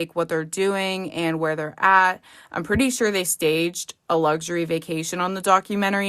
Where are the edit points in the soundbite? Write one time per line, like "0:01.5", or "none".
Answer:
none